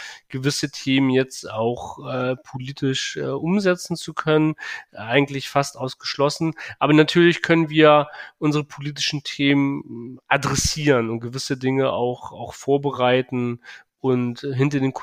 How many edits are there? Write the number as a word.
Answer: zero